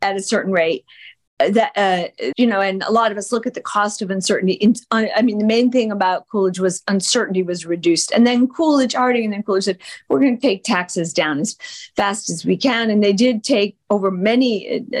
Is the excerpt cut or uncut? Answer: cut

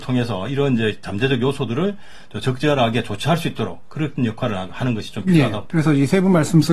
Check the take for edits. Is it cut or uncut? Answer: cut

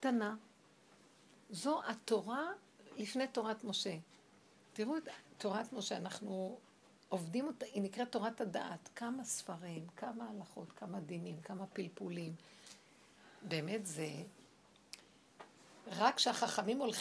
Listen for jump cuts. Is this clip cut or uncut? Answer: uncut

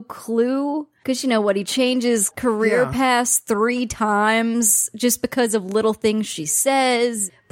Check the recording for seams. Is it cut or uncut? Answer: uncut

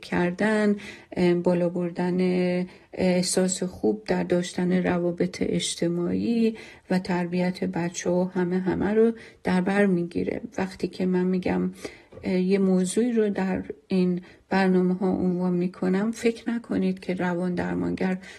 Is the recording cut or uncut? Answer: uncut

